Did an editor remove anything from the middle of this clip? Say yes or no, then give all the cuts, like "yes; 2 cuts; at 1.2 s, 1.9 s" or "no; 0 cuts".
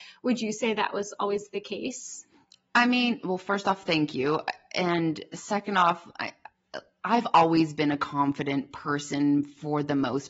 no; 0 cuts